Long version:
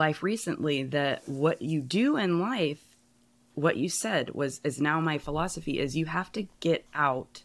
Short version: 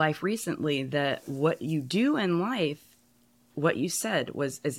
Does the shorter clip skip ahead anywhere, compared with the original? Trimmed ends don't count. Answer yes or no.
no